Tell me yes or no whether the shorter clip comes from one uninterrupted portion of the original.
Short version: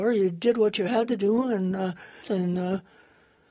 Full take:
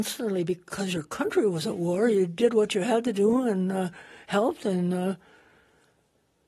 no